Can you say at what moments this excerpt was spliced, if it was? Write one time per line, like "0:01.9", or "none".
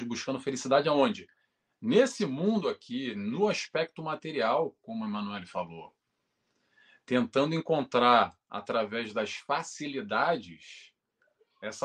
none

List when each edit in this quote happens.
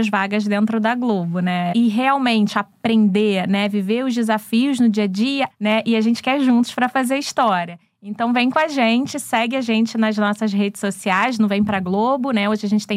0:01.7
0:05.5

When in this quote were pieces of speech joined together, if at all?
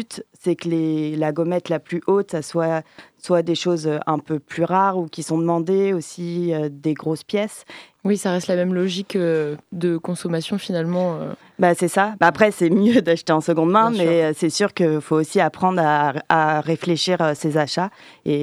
0:07.9

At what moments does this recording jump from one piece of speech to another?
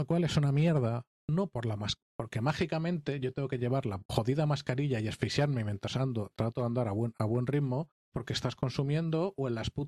0:02.1
0:08.1

